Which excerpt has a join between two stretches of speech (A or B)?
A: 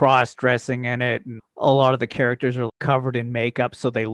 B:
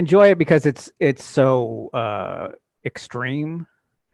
A